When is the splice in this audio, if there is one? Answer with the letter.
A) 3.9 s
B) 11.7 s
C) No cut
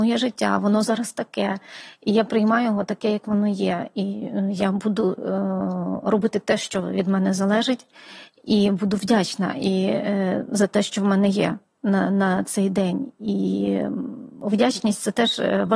C